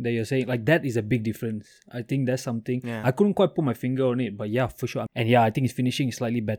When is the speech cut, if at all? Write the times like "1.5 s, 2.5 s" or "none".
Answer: 5.1 s